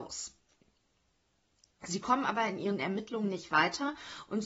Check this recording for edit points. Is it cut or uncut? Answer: uncut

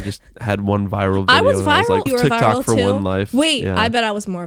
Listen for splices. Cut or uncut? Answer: cut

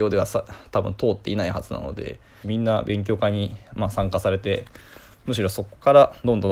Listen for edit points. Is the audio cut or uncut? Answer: cut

